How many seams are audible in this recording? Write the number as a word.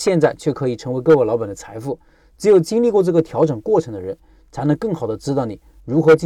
zero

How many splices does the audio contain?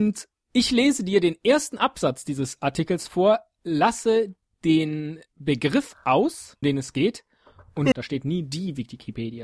two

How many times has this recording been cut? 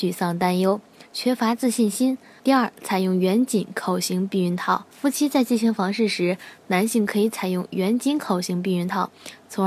two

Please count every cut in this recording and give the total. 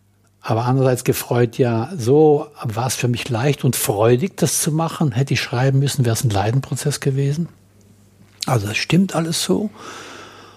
zero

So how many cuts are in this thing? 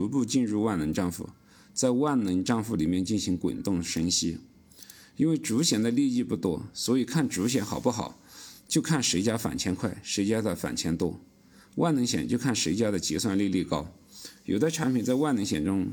zero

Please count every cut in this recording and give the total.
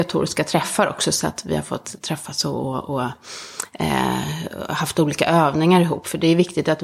zero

